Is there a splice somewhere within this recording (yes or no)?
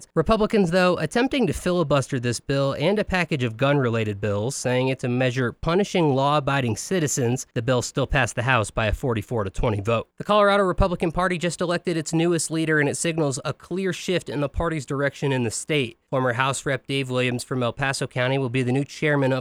no